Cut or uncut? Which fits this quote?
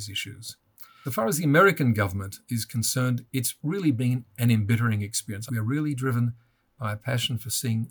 cut